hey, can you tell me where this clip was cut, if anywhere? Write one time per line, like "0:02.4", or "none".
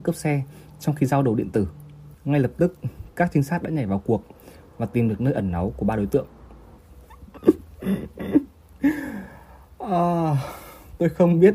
0:06.8